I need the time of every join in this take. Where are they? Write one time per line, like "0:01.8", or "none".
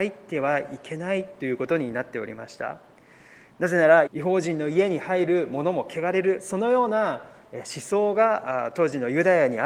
0:04.1